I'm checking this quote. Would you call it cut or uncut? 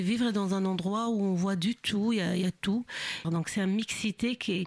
cut